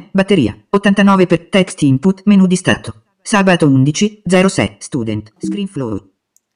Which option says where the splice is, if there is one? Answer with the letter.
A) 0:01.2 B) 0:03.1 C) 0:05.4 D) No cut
C